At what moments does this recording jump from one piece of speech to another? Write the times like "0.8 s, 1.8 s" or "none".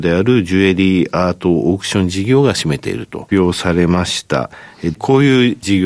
3.3 s, 4.9 s